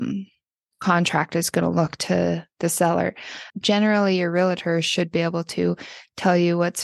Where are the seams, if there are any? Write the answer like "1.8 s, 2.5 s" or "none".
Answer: 3.5 s